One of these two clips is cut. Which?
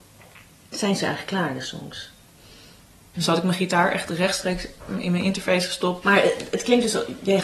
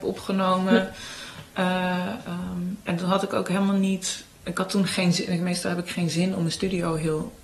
first; 2 cuts; at 3.1 s, 6.0 s

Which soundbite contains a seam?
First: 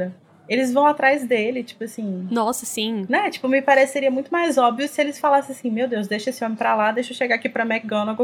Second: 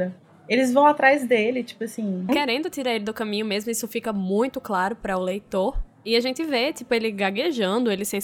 second; 1 cut; at 2.3 s

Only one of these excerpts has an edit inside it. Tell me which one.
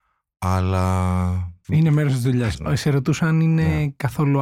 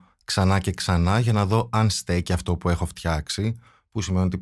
first; 1 cut; at 2.5 s

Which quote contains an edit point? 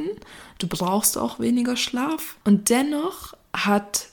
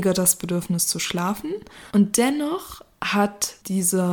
second; 1 cut; at 1.9 s

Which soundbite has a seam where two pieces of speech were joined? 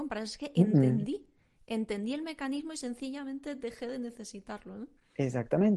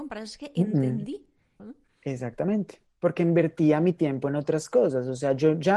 second; 1 cut; at 1.6 s

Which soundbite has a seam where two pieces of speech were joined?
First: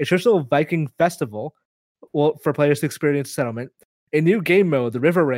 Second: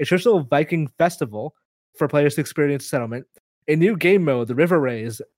second; 1 cut; at 1.9 s

